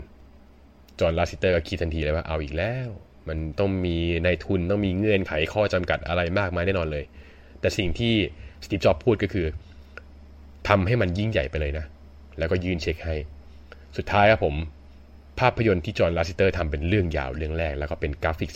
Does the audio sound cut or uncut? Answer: uncut